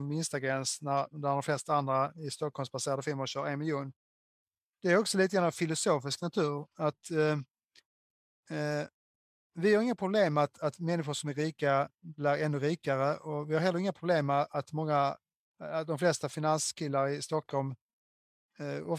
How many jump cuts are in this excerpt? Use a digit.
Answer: 0